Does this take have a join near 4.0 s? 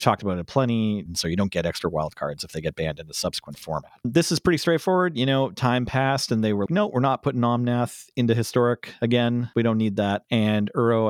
no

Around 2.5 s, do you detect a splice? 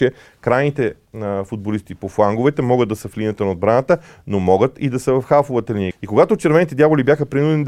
no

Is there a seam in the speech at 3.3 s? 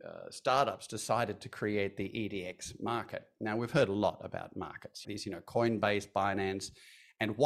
no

